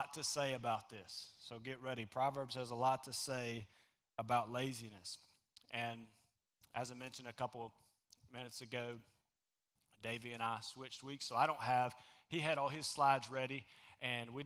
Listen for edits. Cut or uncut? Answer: uncut